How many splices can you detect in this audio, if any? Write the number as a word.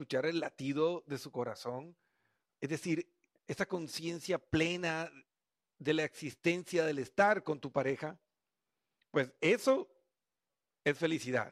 one